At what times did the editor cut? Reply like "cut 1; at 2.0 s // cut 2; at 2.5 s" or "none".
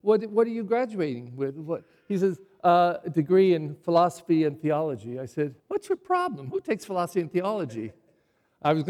cut 1; at 5.6 s